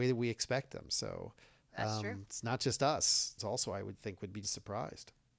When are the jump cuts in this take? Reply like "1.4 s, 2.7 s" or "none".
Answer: 3.4 s, 4.4 s

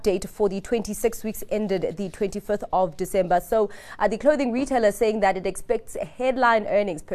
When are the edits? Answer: none

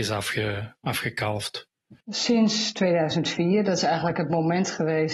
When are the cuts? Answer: 2.0 s

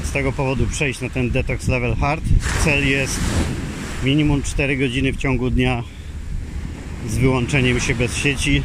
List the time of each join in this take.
none

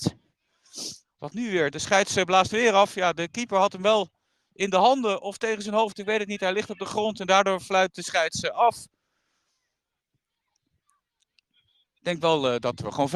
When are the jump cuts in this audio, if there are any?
1.0 s

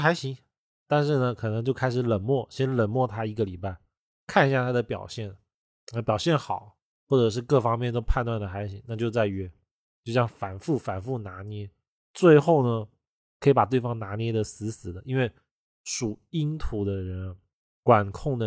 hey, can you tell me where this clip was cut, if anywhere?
none

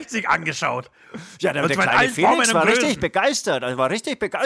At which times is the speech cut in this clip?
none

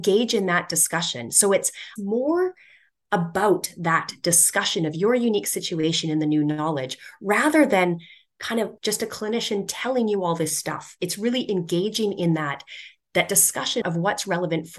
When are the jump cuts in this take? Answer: 2.0 s, 13.8 s

